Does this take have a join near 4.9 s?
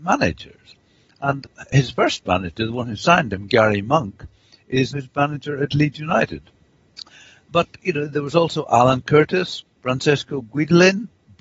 yes; 1 cut; at 4.9 s

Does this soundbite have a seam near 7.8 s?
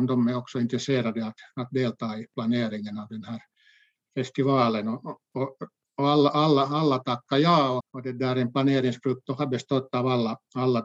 yes; 1 cut; at 7.8 s

